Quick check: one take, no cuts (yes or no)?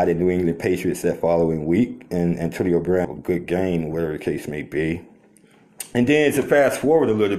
yes